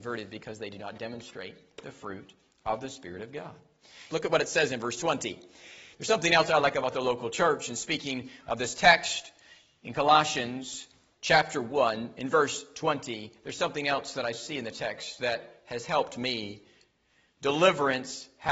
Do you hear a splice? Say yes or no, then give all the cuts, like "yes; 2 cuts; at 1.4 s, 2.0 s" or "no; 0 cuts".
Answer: yes; 2 cuts; at 4.1 s, 5.9 s